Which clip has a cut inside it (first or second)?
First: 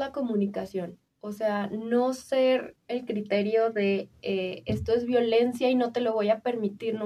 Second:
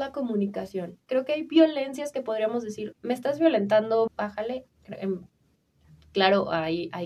second